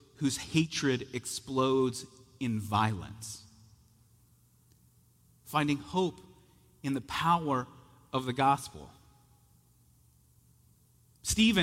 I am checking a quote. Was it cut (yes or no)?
no